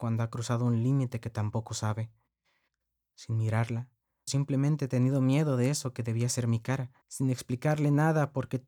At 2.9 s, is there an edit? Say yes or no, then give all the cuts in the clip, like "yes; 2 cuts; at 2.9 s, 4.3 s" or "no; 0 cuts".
no; 2 cuts; at 4.3 s, 7.0 s